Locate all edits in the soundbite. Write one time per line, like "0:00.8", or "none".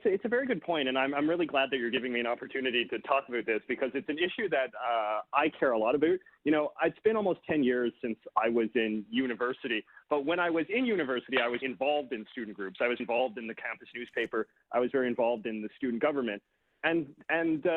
0:11.6
0:13.0